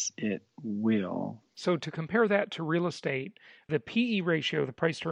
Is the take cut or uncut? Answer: uncut